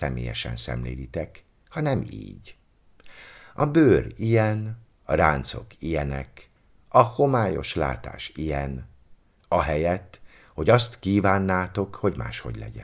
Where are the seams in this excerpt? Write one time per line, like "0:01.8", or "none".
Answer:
none

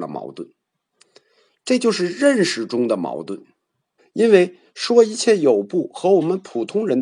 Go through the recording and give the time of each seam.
0:04.0

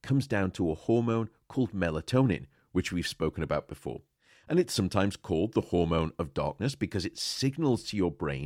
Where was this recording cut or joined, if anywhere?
none

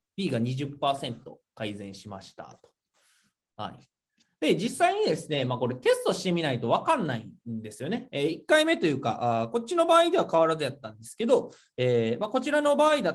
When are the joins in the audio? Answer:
none

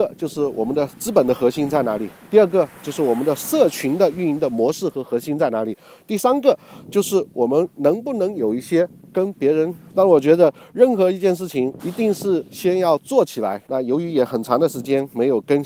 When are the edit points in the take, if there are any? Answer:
0:09.9
0:11.8
0:13.7

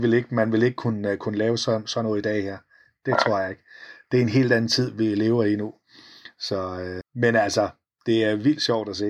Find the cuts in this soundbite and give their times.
0:07.0

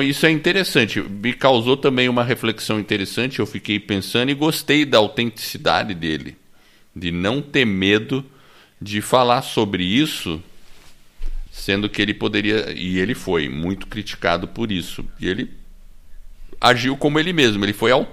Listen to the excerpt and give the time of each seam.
none

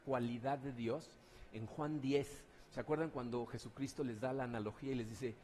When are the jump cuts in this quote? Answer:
none

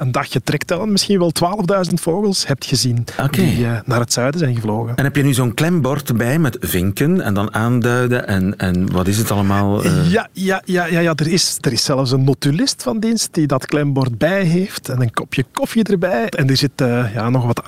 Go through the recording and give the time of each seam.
0:16.3

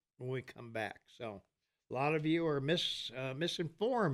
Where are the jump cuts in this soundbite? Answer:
none

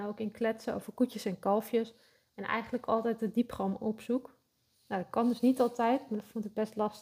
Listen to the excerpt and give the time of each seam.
none

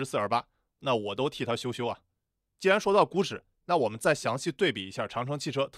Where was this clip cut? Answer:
none

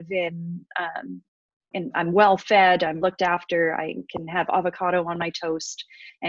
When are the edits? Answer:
0:01.7
0:03.0

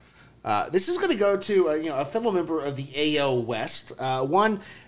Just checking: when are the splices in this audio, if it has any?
none

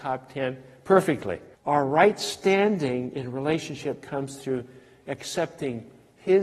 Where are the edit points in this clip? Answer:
0:01.5

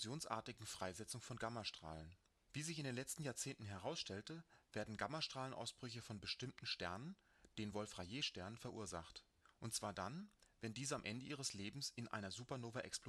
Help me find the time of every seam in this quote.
0:02.4

